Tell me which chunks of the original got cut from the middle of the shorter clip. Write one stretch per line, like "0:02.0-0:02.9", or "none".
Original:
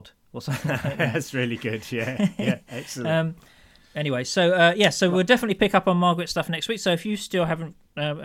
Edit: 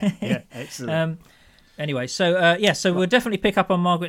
none